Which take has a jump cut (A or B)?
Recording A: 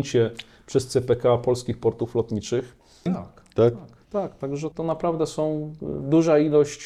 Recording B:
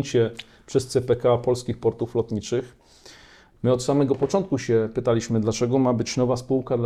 A